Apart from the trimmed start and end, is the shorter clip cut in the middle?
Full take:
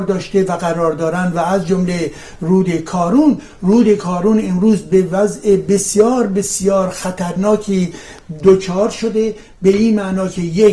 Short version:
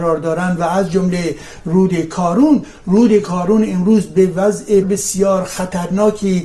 yes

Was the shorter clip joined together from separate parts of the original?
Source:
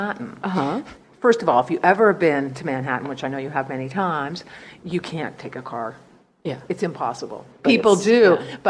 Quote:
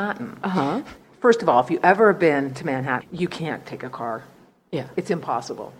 yes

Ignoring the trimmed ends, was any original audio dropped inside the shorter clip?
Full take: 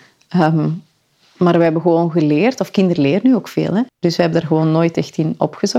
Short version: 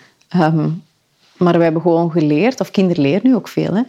no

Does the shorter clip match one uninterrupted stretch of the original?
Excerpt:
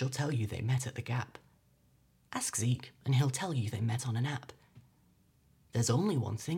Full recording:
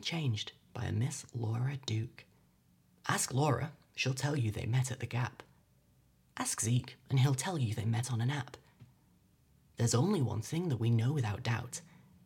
yes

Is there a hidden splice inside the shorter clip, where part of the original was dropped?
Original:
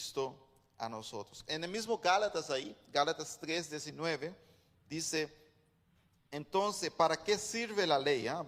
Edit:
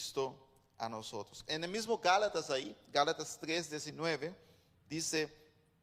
no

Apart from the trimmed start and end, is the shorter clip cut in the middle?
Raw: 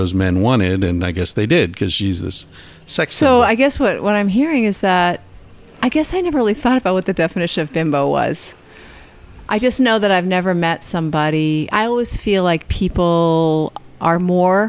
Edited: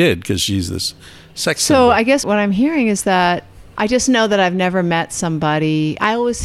yes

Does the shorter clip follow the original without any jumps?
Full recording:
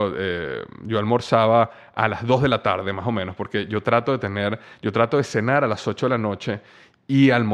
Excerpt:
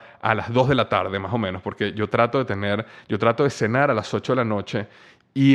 yes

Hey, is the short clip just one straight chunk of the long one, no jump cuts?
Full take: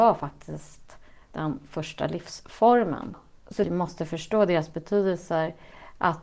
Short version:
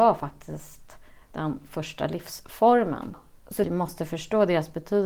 yes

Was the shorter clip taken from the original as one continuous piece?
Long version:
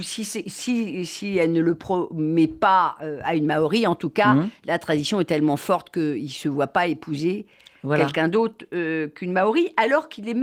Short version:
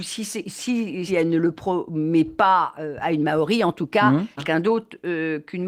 no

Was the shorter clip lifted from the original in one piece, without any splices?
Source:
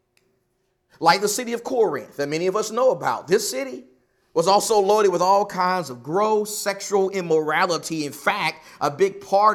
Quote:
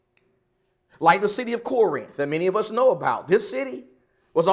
yes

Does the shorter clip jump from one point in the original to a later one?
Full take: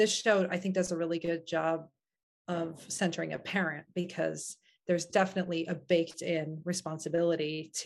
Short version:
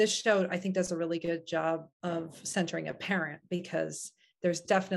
yes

